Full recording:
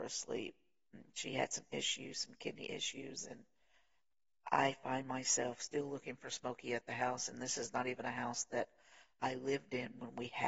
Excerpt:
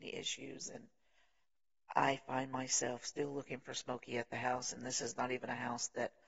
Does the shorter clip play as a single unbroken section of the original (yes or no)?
yes